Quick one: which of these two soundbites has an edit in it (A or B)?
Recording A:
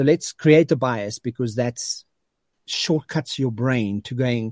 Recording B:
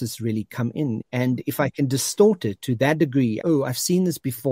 B